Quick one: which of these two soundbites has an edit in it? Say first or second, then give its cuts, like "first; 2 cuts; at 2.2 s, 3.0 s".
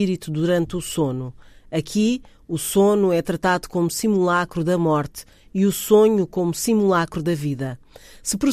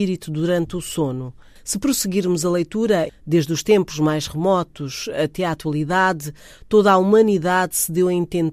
second; 2 cuts; at 1.6 s, 3.1 s